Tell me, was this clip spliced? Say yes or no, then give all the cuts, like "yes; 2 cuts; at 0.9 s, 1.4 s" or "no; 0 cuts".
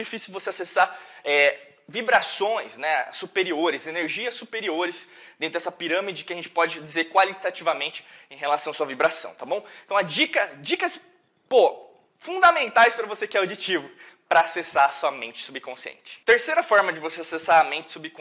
no; 0 cuts